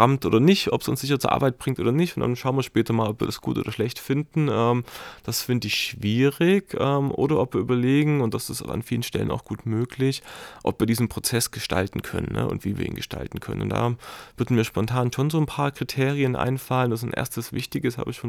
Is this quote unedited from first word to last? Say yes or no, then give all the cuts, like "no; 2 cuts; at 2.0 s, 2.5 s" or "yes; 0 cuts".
yes; 0 cuts